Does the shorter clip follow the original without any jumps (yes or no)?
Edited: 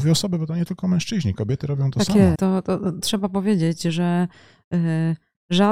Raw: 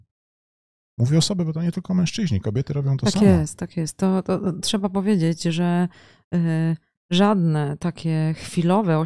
no